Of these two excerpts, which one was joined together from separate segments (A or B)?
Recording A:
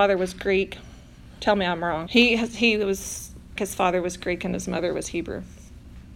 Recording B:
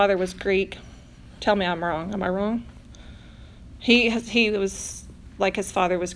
A